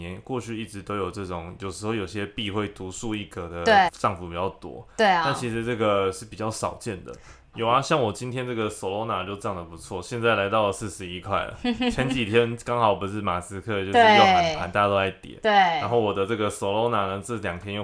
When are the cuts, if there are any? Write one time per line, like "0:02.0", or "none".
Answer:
0:03.9
0:07.5